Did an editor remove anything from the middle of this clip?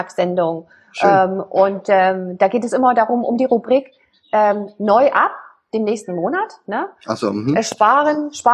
no; 0 cuts

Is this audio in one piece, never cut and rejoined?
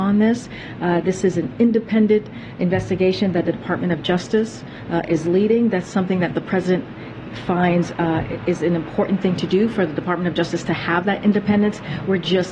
yes; 0 cuts

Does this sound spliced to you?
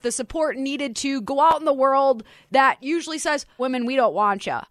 yes; 1 cut; at 3.6 s

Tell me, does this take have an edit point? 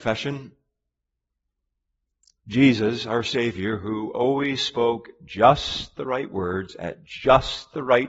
no; 0 cuts

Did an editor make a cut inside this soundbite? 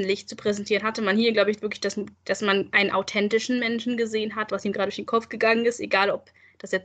yes; 2 cuts; at 2.1 s, 4.5 s

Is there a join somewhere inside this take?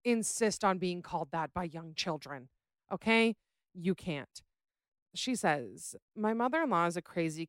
yes; 1 cut; at 5.1 s

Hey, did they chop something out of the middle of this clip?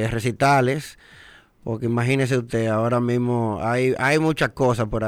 no; 0 cuts

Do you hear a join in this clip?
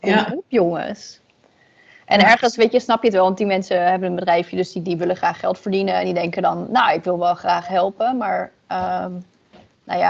no; 0 cuts

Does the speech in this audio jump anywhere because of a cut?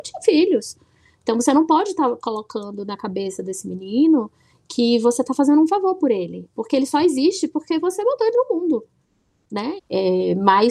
yes; 1 cut; at 9.8 s

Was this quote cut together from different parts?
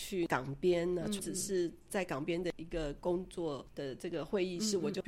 yes; 1 cut; at 1.2 s

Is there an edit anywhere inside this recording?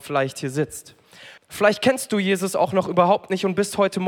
yes; 1 cut; at 1.4 s

